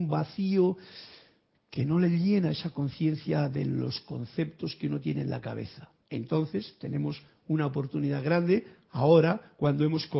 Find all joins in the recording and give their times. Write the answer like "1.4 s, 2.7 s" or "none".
6.0 s

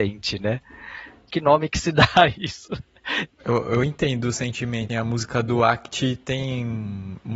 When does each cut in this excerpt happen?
1.3 s, 3.3 s, 4.9 s

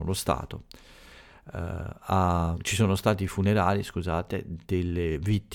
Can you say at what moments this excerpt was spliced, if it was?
2.5 s

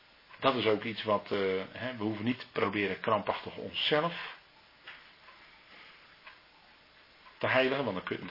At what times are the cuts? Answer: none

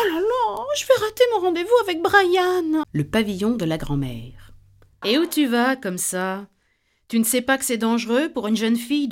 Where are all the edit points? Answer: 2.8 s, 5.0 s

